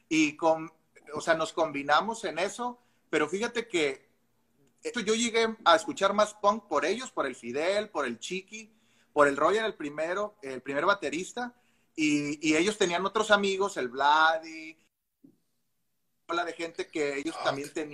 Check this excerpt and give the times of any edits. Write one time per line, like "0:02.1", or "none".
0:04.9